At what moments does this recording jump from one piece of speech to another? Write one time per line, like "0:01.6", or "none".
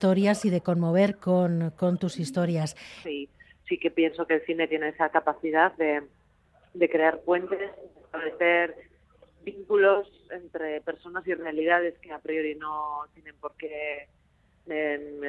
0:03.0